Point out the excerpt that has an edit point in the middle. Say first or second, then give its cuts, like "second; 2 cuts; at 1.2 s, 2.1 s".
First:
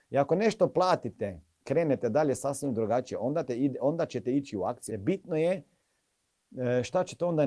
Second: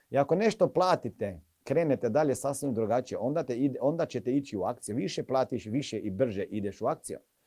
first; 1 cut; at 4.9 s